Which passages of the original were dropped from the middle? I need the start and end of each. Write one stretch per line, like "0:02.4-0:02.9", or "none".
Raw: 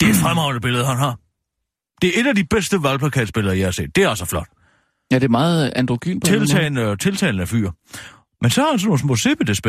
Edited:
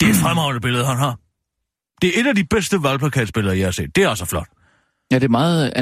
none